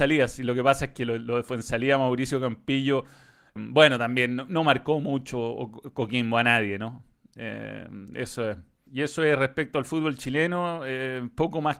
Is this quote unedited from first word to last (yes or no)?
no